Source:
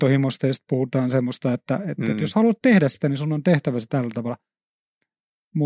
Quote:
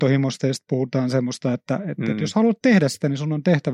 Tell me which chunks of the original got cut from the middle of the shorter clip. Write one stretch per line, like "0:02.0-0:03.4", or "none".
none